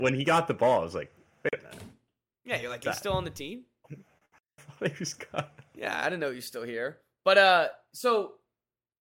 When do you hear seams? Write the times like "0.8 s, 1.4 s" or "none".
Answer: none